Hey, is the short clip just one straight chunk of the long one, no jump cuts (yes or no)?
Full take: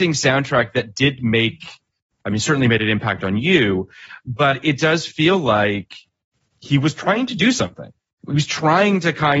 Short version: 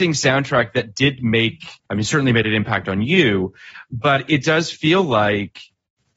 no